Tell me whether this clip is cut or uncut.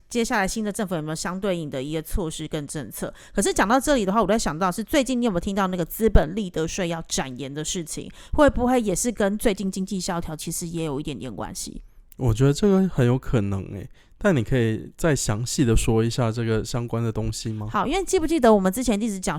uncut